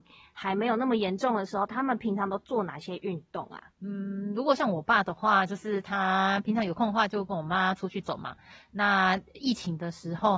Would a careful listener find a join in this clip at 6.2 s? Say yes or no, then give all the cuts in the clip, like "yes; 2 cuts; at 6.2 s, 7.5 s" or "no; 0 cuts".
no; 2 cuts; at 3.7 s, 8.0 s